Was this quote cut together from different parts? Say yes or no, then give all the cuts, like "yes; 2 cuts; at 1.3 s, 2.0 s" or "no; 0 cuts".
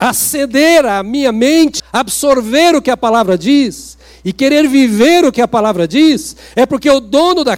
yes; 1 cut; at 1.8 s